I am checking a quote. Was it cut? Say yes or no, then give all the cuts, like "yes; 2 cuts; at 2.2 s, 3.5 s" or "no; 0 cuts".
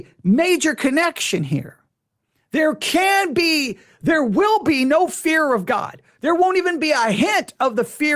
no; 0 cuts